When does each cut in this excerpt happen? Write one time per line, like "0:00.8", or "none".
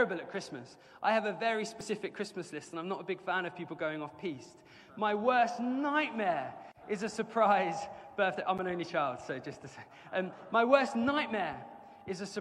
none